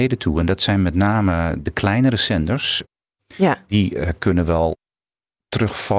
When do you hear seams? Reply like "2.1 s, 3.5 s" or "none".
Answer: 3.2 s